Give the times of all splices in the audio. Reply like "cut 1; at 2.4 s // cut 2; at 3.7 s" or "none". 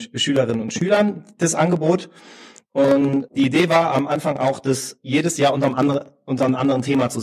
cut 1; at 3.3 s